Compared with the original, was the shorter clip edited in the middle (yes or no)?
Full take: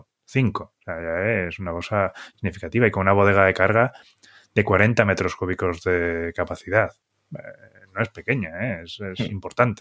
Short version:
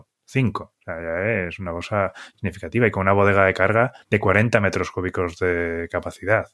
yes